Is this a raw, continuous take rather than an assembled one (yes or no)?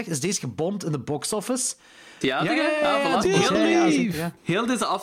no